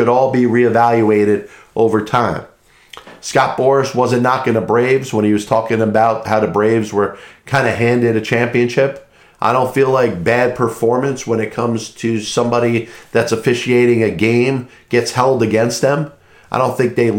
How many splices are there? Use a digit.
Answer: 1